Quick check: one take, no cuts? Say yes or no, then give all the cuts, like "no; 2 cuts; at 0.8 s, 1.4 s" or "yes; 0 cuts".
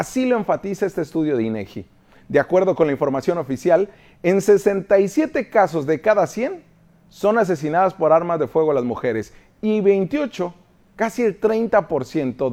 yes; 0 cuts